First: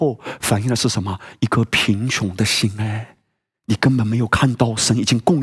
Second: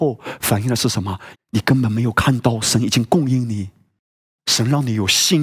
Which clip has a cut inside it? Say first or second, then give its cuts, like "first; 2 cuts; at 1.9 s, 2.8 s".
second; 2 cuts; at 1.3 s, 4.3 s